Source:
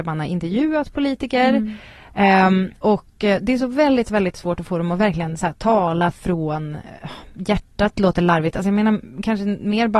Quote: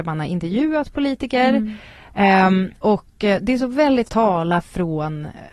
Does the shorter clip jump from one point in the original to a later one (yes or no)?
yes